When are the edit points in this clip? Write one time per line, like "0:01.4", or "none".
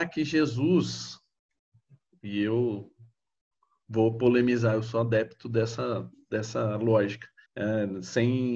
0:07.4